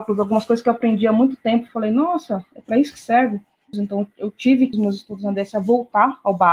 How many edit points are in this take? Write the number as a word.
two